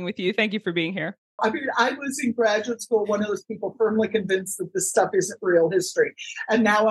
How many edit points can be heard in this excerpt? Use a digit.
1